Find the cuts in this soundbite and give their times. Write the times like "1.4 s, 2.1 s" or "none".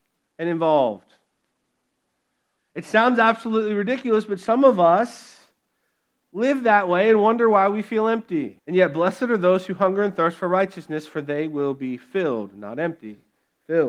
2.6 s, 8.6 s